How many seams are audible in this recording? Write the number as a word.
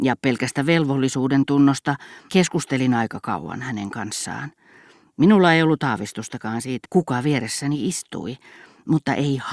two